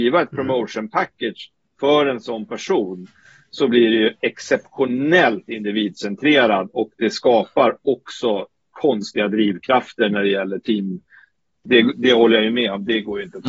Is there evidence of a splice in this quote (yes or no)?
yes